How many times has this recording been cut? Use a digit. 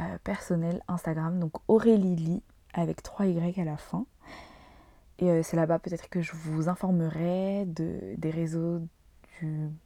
0